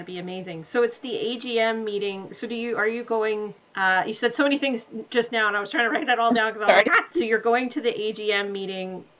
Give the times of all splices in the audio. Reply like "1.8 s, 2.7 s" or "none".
7.1 s